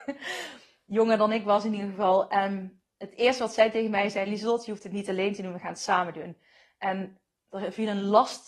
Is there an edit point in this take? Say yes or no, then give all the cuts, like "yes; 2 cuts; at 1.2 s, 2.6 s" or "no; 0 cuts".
no; 0 cuts